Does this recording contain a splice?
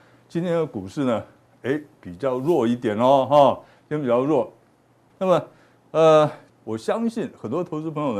yes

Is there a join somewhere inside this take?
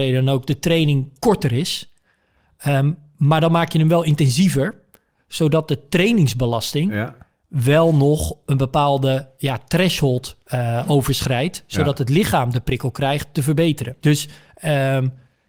yes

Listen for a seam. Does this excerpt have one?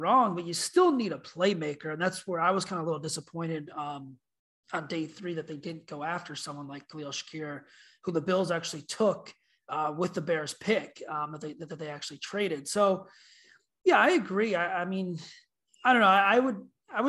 no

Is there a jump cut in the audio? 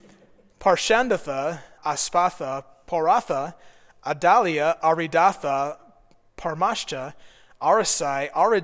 yes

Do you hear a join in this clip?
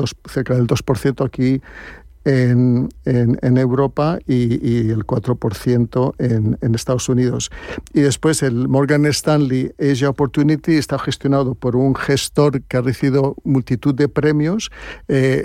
no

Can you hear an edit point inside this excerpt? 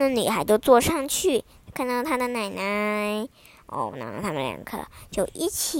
yes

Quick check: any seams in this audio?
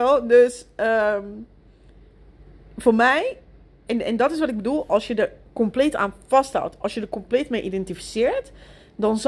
no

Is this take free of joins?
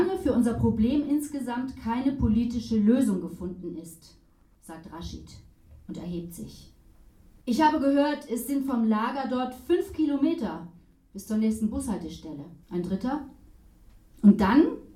no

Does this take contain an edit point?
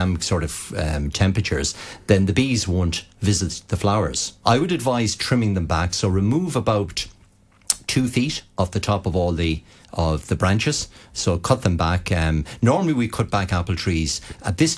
yes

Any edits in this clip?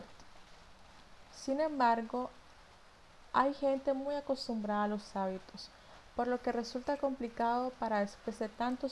no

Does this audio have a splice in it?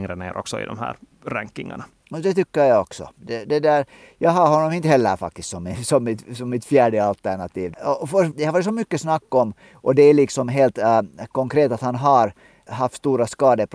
yes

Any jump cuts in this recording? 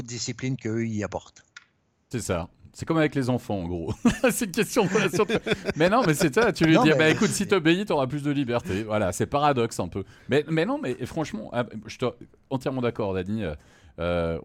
no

